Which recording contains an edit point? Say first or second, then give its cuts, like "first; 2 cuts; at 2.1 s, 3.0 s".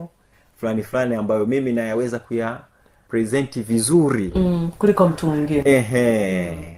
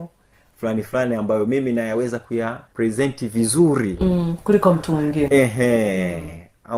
second; 1 cut; at 2.7 s